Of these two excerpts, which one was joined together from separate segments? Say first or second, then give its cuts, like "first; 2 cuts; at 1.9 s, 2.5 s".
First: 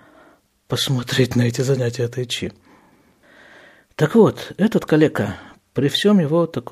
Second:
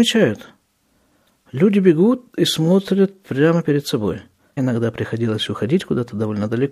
second; 1 cut; at 4.6 s